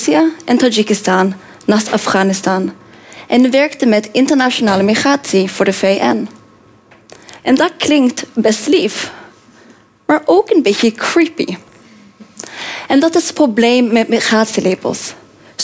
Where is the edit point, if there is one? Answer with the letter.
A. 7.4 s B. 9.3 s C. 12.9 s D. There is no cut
A